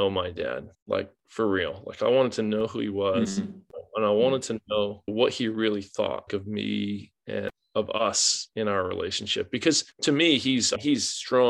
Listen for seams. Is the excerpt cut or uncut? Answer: cut